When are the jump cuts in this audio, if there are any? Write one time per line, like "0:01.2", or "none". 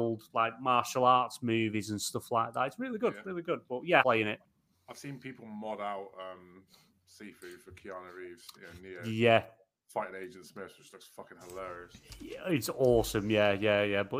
0:04.0